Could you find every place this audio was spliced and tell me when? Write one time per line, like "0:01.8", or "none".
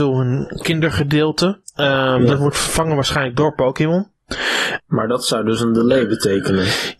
0:01.6
0:04.8